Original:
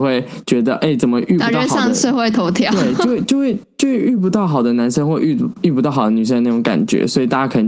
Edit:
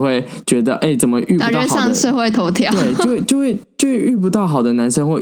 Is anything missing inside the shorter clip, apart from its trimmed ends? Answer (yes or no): no